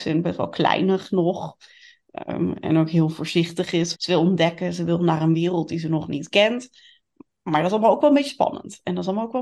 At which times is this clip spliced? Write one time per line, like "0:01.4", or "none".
0:03.9